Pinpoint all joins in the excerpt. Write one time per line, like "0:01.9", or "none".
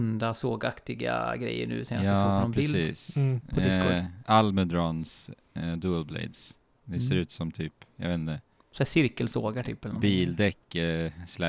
0:04.2